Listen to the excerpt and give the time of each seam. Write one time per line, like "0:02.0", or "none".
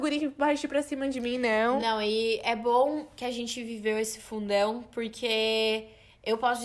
none